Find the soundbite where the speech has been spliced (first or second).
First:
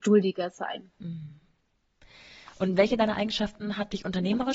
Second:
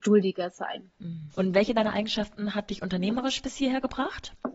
second